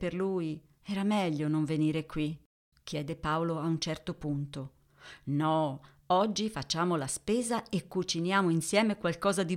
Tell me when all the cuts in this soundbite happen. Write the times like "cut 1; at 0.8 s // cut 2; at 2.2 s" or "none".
cut 1; at 2.7 s